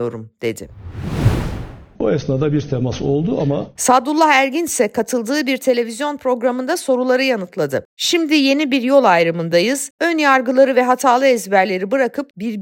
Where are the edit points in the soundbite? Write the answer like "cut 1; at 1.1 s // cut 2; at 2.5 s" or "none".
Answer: cut 1; at 1.9 s // cut 2; at 3.7 s // cut 3; at 7.9 s